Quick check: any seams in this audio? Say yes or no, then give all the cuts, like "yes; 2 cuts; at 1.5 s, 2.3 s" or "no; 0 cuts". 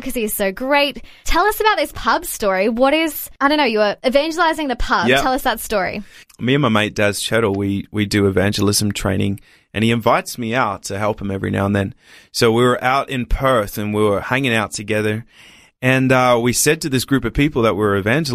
no; 0 cuts